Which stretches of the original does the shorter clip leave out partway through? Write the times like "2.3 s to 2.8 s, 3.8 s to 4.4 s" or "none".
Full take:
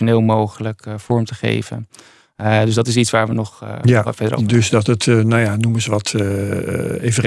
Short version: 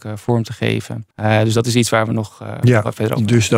1.9 s to 2.3 s